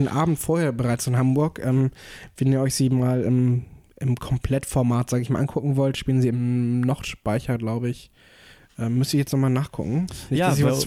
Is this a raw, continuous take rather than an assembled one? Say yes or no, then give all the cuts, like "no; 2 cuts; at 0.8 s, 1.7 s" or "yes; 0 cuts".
yes; 0 cuts